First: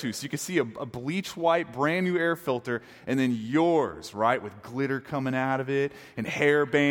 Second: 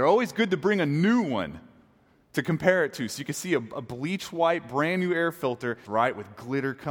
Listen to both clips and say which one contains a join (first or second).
second